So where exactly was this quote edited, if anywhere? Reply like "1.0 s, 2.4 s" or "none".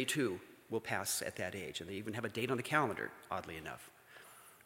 none